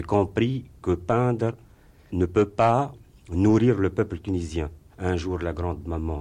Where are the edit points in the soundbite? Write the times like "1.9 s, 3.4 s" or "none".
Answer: 2.1 s, 4.9 s